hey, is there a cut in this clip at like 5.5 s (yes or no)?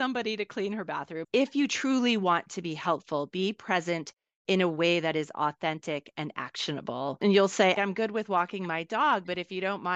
no